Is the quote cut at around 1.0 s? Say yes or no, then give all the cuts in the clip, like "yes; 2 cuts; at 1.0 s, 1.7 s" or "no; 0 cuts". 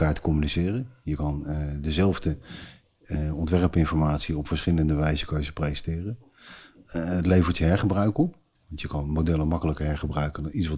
no; 0 cuts